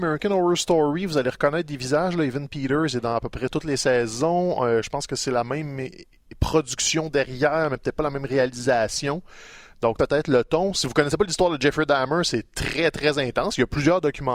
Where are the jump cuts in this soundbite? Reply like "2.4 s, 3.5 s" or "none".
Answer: 10.0 s